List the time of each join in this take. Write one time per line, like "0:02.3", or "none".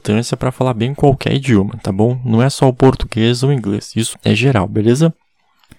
0:04.1